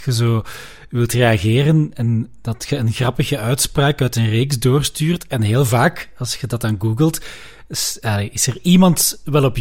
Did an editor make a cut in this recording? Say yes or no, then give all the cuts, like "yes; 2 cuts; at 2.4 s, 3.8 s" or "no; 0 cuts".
no; 0 cuts